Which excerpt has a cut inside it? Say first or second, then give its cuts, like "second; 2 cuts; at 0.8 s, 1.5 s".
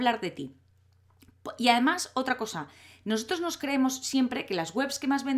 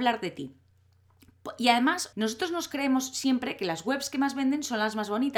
second; 1 cut; at 2.1 s